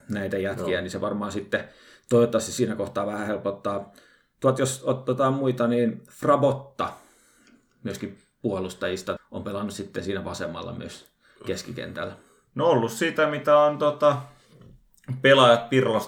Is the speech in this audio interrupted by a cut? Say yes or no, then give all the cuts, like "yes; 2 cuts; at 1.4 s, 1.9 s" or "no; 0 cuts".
yes; 1 cut; at 9.2 s